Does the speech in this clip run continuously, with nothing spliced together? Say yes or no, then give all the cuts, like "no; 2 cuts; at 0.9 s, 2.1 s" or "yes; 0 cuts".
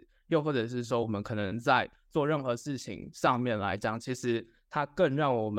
yes; 0 cuts